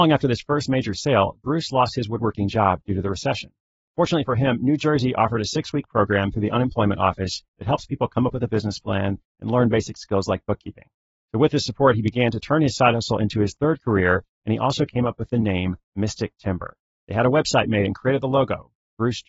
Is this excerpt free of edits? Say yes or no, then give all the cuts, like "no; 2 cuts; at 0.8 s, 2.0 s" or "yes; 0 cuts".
yes; 0 cuts